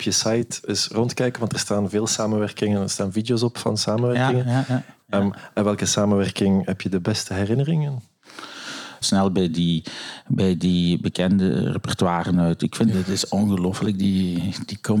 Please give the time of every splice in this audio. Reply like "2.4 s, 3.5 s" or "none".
5.0 s, 9.0 s, 12.9 s